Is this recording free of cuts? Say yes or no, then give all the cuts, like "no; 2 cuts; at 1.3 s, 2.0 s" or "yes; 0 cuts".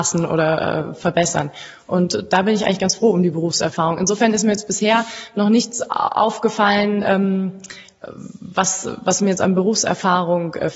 yes; 0 cuts